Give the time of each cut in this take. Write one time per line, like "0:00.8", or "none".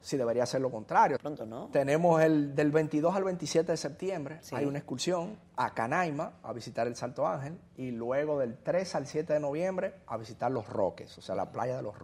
0:01.2